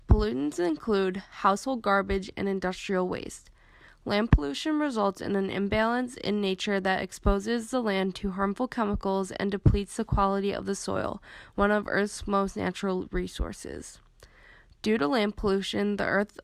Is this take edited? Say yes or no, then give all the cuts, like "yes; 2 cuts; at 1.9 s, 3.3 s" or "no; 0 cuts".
no; 0 cuts